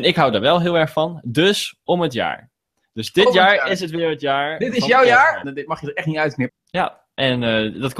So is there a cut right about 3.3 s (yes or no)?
no